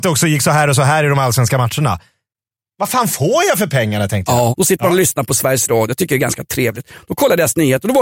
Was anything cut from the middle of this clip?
yes; 1 cut; at 4.5 s

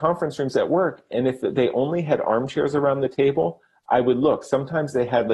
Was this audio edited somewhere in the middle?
no; 0 cuts

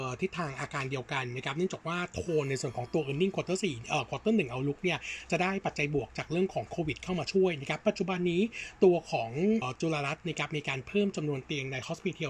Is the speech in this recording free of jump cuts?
no; 1 cut; at 9.6 s

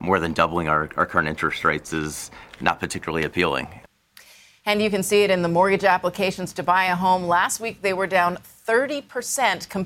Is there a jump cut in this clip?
no; 0 cuts

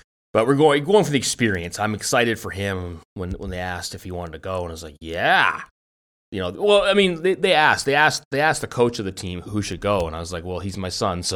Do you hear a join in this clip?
yes; 1 cut; at 9.4 s

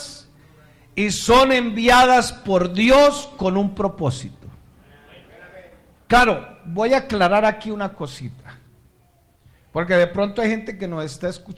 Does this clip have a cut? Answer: no; 0 cuts

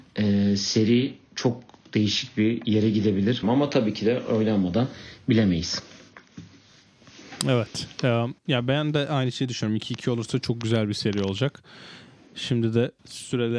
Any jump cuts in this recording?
yes; 1 cut; at 3.4 s

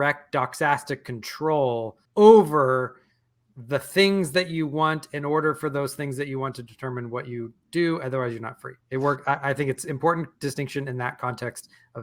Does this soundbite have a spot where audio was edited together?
yes; 2 cuts; at 2.1 s, 8.8 s

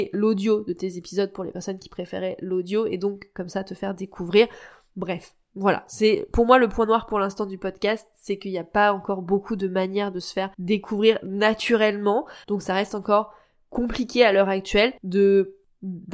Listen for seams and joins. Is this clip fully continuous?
no; 3 cuts; at 10.5 s, 12.4 s, 15.0 s

